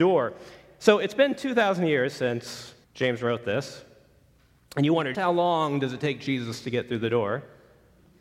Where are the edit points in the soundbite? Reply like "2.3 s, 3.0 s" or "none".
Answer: 2.8 s, 5.1 s